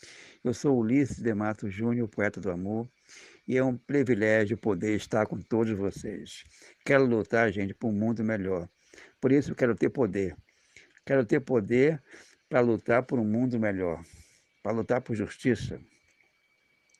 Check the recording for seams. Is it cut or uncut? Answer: uncut